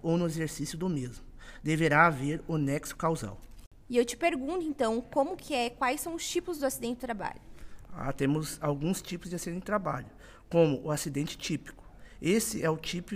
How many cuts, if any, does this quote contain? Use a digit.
0